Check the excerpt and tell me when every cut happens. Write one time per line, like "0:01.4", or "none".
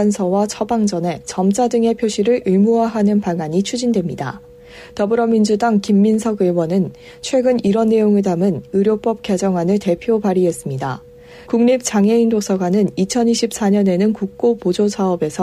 0:11.5